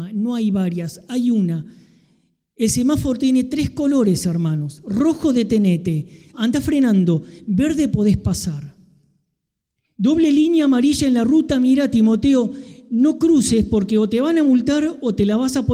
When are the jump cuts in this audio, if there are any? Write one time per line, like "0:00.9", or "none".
0:06.3